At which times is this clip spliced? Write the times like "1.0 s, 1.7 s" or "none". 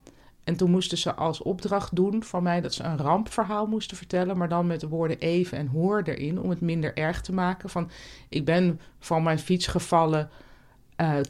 none

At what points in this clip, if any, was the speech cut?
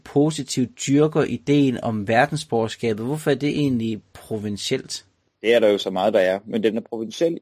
5.4 s

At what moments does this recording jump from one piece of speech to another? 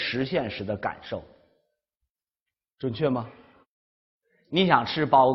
none

